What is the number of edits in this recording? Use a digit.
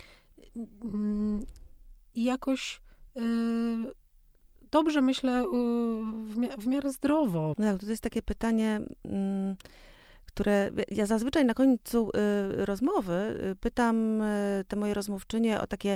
1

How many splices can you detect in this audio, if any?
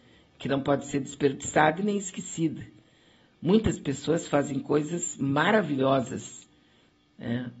0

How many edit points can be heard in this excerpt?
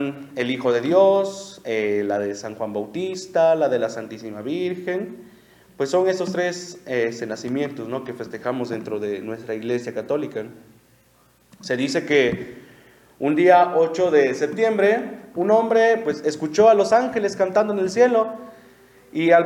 0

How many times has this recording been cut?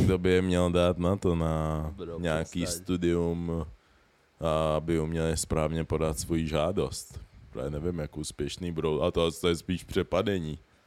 0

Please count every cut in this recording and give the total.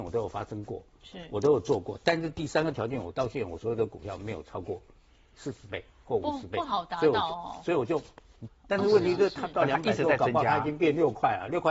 1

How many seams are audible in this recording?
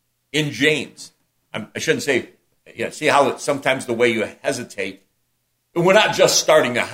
0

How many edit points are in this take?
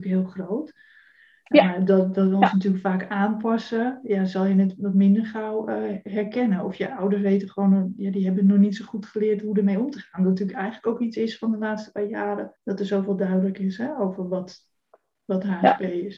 1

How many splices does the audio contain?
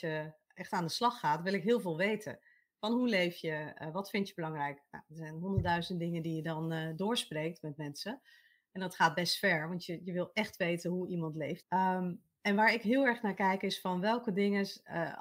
1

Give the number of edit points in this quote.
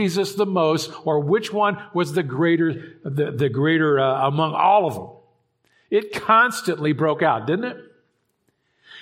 0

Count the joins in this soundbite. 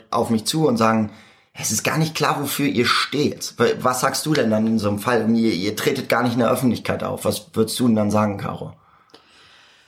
0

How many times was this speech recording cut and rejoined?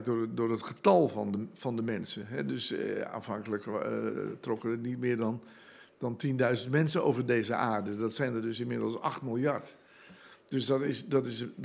0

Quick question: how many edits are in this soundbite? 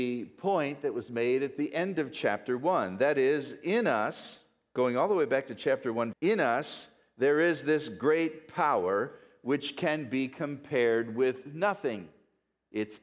1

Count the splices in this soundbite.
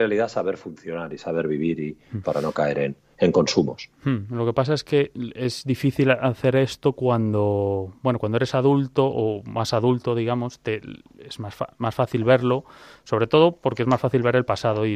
1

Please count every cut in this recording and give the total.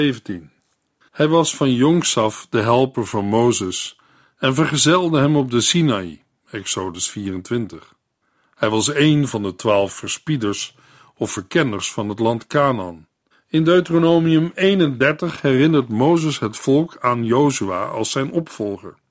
1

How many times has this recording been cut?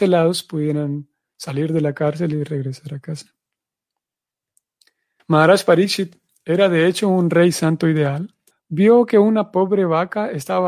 2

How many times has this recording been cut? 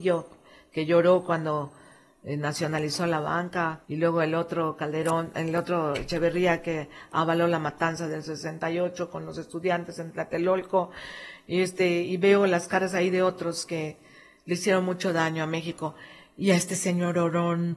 1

